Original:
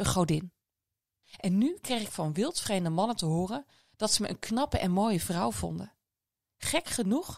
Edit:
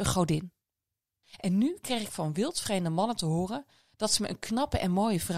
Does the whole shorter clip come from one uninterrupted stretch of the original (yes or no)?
yes